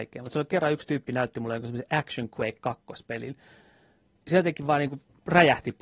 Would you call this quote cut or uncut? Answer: uncut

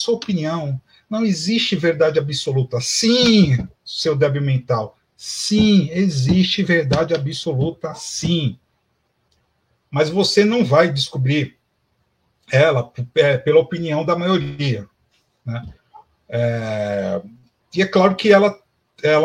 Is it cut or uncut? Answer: uncut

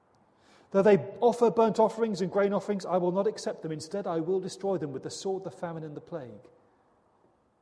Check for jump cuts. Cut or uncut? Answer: uncut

